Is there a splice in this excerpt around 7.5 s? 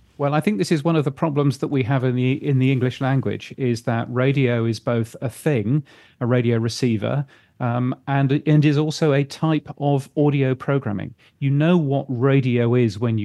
no; 0 cuts

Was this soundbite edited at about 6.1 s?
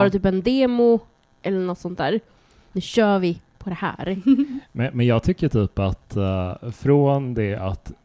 no; 1 cut; at 2.7 s

